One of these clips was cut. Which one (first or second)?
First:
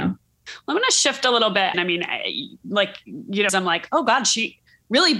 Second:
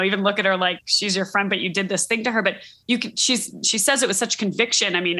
first